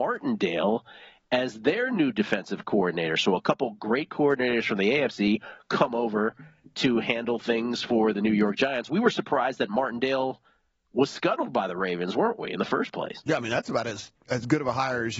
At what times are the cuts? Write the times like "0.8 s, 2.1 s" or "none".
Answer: 8.9 s